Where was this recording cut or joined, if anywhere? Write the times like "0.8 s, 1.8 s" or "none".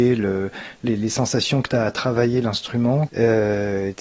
3.1 s